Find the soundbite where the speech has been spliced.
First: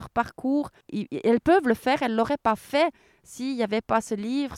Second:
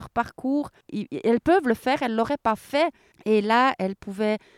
second; 1 cut; at 3.1 s

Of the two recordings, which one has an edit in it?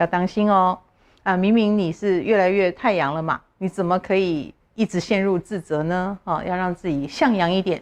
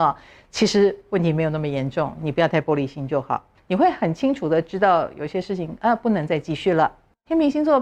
second; 1 cut; at 3.6 s

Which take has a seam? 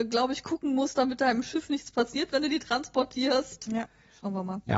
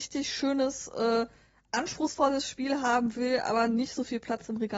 first; 2 cuts; at 0.9 s, 3.7 s

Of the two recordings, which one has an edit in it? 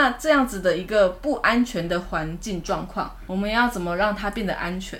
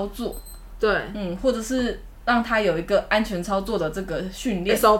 first; 1 cut; at 3.3 s

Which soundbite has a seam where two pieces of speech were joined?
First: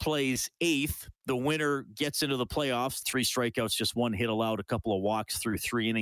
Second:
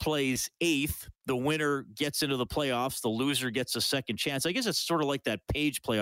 first; 1 cut; at 3.0 s

